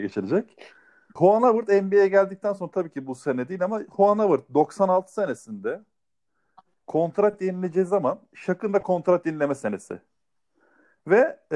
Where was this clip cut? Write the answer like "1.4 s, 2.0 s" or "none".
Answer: 1.2 s